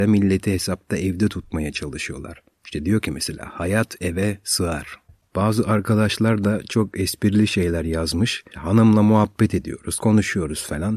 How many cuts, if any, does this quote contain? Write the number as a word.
two